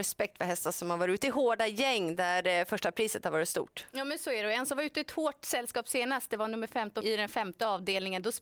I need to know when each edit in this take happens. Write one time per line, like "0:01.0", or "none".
0:07.0